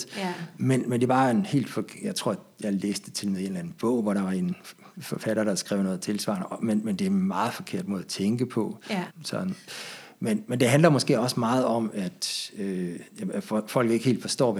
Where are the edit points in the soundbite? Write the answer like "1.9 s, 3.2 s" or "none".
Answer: 9.1 s